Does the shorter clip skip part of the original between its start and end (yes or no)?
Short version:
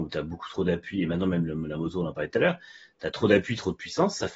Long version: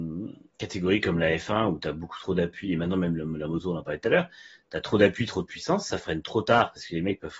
no